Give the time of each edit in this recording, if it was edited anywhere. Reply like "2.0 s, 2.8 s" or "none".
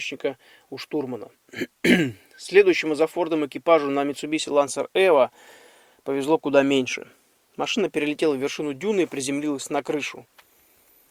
none

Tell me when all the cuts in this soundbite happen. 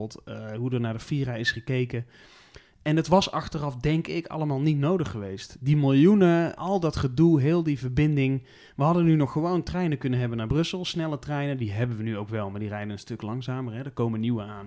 6.5 s

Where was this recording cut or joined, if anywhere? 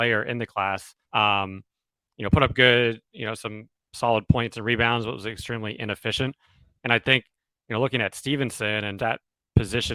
1.0 s, 9.0 s

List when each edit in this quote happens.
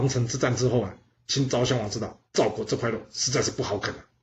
2.3 s

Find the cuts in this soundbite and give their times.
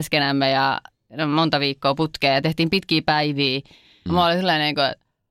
4.1 s

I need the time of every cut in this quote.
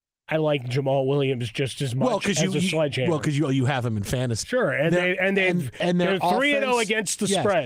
4.4 s

